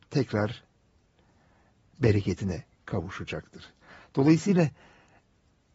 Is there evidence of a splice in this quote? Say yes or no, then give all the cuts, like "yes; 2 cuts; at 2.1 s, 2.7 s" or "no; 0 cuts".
no; 0 cuts